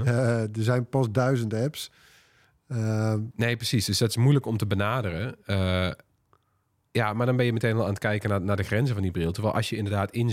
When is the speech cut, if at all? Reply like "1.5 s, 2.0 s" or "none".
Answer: 3.3 s